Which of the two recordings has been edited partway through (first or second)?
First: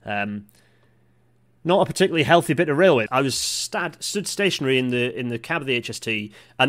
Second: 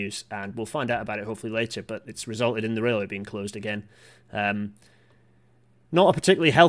first